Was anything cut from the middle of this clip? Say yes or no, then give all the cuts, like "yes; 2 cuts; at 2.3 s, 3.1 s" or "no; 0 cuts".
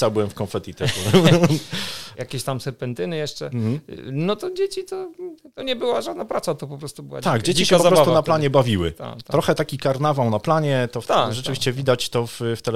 no; 0 cuts